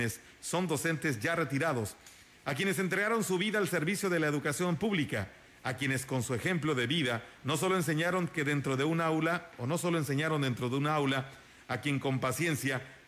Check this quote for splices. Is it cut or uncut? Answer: uncut